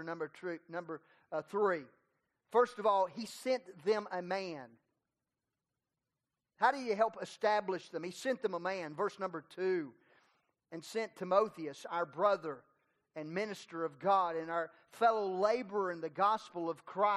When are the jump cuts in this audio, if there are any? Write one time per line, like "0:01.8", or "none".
none